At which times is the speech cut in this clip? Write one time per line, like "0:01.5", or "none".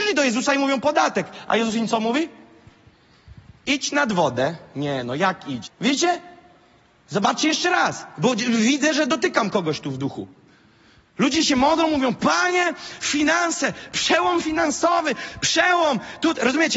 0:05.6